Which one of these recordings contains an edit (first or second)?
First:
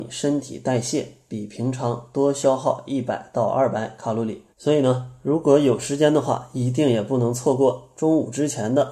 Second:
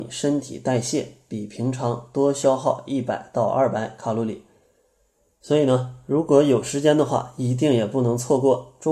first